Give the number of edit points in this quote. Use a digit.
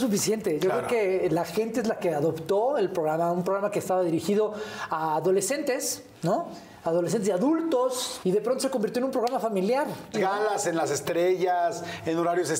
2